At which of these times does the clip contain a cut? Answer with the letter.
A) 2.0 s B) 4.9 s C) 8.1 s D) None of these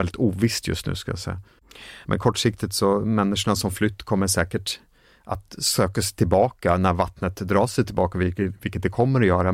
A